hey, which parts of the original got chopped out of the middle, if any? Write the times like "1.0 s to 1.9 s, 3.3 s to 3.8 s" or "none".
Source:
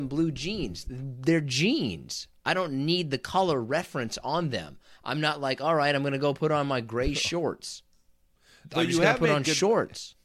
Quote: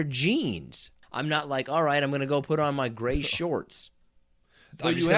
2.4 s to 4.9 s